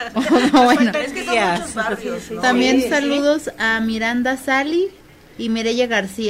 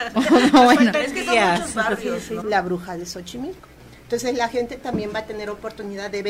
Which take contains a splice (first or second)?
second